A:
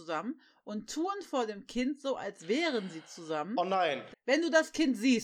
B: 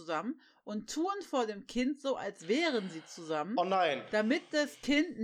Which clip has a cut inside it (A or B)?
A